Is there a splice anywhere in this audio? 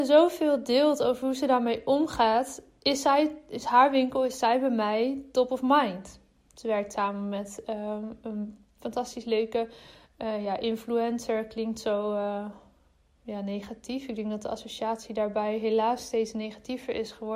no; 0 cuts

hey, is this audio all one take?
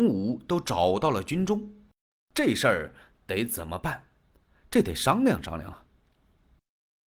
yes; 0 cuts

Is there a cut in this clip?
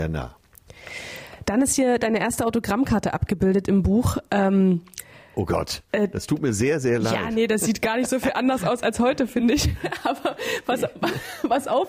no; 0 cuts

